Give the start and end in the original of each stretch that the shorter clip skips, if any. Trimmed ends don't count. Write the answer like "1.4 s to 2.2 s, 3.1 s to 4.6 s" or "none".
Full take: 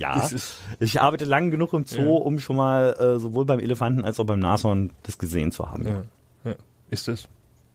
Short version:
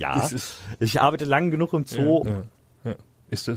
2.2 s to 5.8 s